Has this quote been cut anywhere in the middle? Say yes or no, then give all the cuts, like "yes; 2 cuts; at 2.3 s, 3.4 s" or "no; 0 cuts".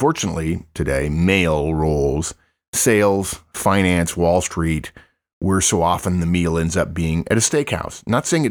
no; 0 cuts